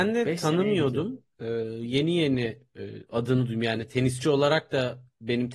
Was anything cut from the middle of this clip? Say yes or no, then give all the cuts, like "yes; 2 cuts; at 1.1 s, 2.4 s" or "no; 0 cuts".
no; 0 cuts